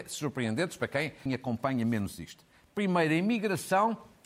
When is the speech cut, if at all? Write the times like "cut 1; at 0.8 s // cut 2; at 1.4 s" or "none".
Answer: cut 1; at 1.3 s